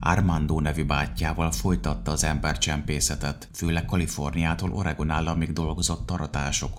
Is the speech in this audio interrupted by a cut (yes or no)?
yes